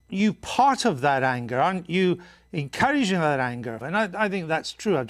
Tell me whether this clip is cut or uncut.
cut